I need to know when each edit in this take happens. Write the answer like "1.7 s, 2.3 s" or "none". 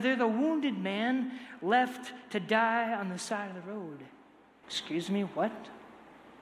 4.6 s